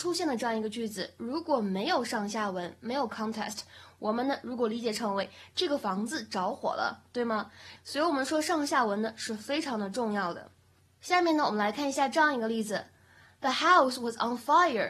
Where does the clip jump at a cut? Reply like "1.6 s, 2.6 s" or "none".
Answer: 7.8 s